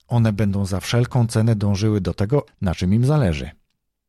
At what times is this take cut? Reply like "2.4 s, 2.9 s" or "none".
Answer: 2.5 s